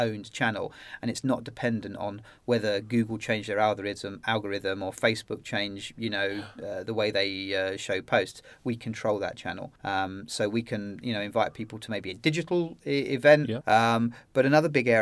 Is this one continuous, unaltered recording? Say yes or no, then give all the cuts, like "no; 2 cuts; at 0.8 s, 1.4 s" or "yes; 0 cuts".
no; 2 cuts; at 9.8 s, 13.6 s